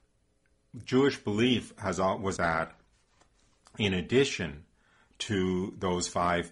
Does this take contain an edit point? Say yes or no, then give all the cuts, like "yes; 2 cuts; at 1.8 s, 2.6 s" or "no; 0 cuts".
yes; 1 cut; at 2.4 s